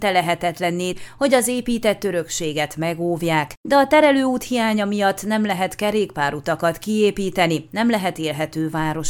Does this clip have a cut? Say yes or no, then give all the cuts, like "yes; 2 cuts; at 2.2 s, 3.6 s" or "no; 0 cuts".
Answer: yes; 1 cut; at 0.9 s